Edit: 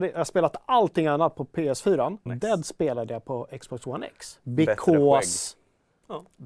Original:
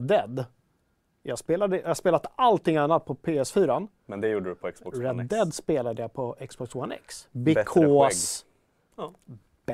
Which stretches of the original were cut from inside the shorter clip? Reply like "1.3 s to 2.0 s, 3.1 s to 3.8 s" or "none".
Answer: 4.0 s to 5.1 s

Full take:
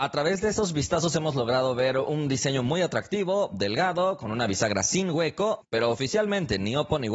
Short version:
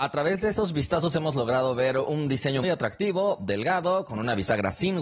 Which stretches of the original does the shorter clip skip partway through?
2.6 s to 2.7 s

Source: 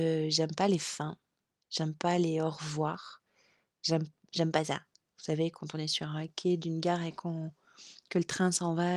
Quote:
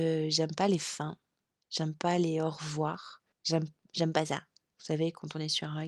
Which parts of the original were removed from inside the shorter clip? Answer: 3.3 s to 3.7 s

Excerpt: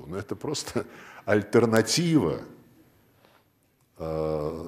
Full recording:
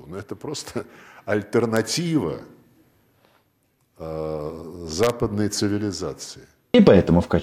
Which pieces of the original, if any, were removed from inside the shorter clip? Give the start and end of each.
none

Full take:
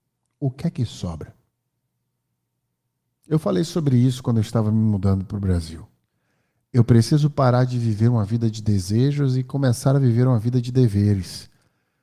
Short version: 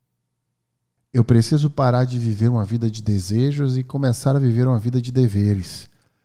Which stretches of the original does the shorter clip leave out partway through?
2.8 s to 6.6 s

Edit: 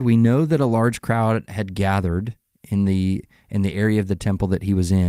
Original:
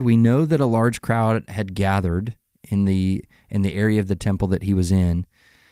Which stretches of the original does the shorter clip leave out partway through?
none

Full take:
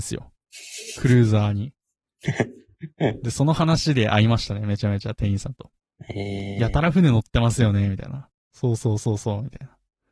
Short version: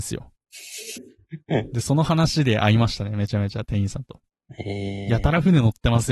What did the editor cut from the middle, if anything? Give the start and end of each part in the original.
1.0 s to 2.5 s

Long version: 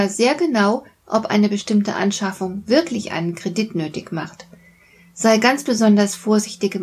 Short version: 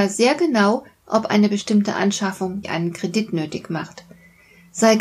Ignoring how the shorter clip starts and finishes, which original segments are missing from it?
2.6 s to 3.1 s

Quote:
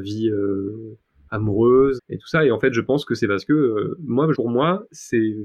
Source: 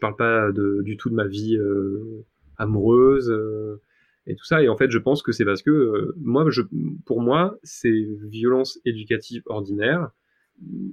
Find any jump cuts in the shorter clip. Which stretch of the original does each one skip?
3.2 s to 4.1 s, 6.5 s to 7.0 s

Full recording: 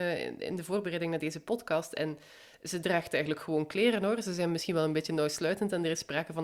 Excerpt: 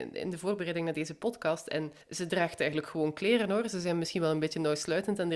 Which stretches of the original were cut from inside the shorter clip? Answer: 2.3 s to 2.5 s

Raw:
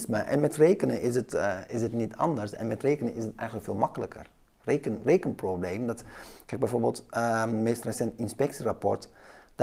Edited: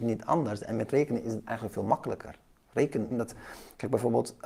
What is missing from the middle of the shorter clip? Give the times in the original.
5.0 s to 5.8 s

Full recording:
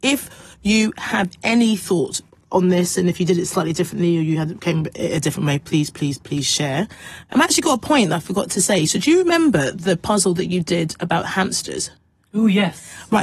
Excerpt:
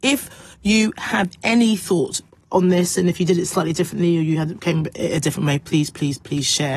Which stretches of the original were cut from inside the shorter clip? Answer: none

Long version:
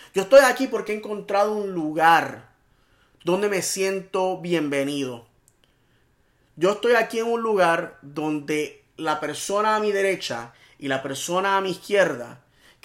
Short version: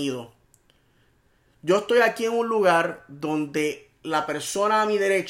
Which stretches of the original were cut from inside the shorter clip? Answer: none

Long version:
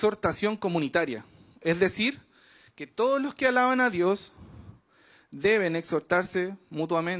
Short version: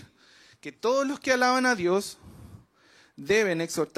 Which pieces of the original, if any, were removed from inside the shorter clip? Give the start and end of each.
none

